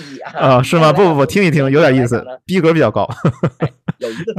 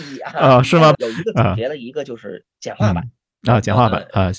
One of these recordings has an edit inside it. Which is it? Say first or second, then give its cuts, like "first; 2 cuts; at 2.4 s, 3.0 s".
second; 1 cut; at 0.9 s